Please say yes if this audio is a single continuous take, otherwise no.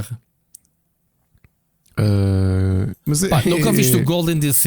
yes